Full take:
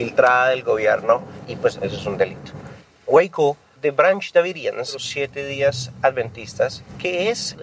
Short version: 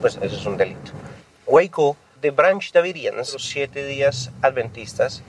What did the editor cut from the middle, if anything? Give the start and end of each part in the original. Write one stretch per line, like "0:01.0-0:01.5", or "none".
none